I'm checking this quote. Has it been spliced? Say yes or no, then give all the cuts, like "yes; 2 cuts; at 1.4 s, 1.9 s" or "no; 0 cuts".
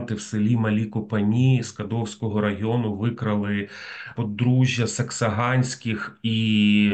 no; 0 cuts